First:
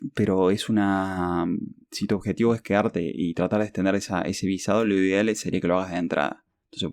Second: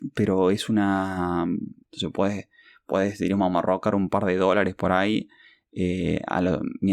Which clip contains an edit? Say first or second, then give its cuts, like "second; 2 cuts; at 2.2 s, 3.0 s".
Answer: second; 1 cut; at 1.8 s